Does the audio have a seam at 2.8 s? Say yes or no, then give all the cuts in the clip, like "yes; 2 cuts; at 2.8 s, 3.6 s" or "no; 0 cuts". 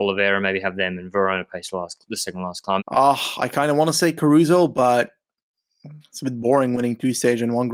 yes; 1 cut; at 2.8 s